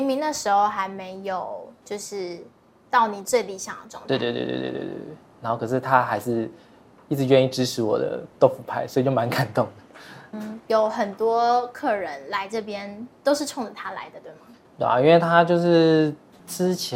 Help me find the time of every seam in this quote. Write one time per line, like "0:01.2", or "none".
0:10.3